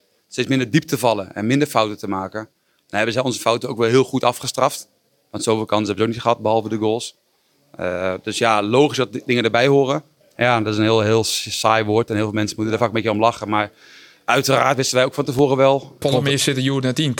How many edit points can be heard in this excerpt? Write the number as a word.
two